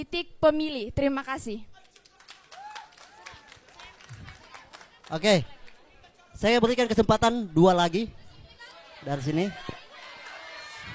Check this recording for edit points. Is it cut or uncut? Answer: uncut